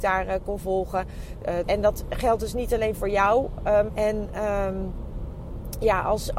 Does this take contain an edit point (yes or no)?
yes